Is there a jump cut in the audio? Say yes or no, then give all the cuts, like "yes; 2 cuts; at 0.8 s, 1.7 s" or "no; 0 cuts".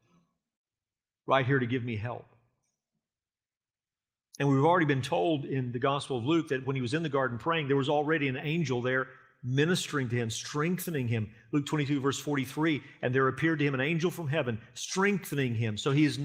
no; 0 cuts